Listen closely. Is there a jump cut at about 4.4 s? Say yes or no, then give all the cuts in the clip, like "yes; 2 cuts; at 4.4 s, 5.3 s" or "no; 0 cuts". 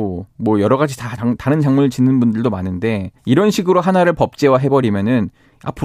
no; 2 cuts; at 1.2 s, 3.2 s